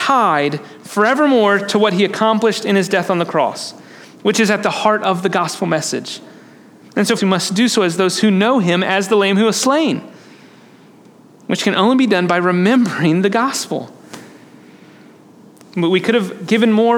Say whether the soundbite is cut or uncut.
cut